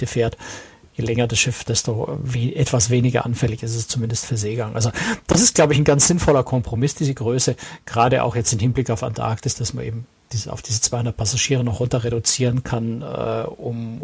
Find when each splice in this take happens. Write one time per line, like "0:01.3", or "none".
none